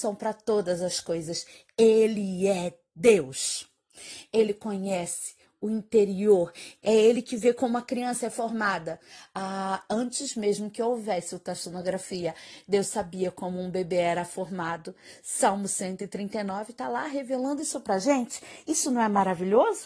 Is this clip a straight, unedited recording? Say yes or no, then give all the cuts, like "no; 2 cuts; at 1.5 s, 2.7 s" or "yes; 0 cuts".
no; 1 cut; at 6.8 s